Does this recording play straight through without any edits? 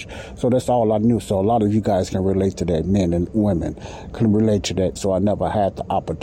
no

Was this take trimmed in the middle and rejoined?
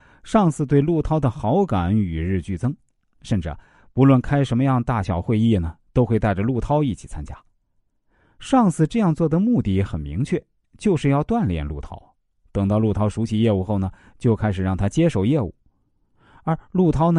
no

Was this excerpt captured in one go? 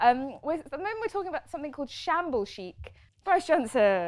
no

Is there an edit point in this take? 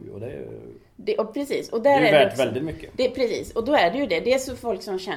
no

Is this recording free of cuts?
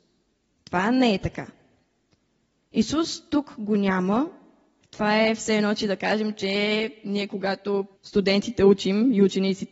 no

